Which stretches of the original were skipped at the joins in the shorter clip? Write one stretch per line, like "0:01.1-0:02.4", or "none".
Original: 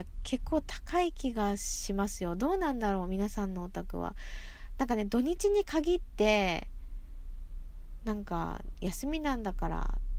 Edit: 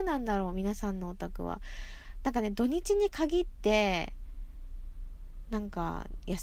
none